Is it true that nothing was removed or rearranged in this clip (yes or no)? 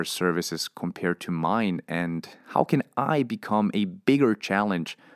yes